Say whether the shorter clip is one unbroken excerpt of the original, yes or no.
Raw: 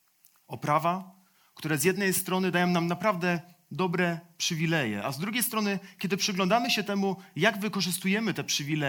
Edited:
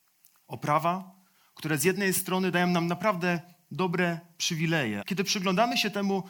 no